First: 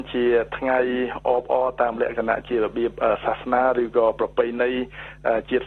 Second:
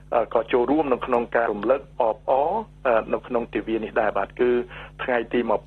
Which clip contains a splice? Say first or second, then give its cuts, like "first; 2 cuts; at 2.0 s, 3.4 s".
second; 1 cut; at 1.5 s